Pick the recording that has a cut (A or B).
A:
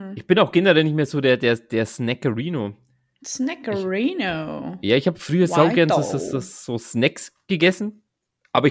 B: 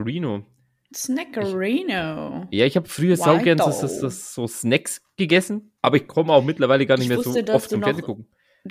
B